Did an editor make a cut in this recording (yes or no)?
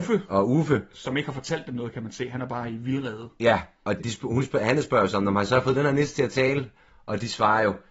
yes